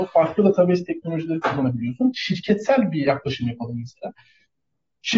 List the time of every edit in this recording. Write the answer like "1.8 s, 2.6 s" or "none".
none